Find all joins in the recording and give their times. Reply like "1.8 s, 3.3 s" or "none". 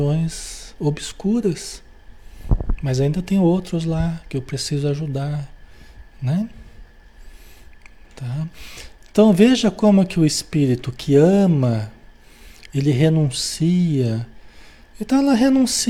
none